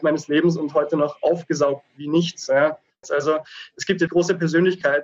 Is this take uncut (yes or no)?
no